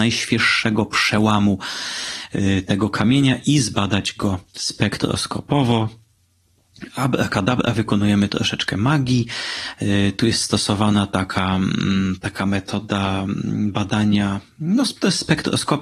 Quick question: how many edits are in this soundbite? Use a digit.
1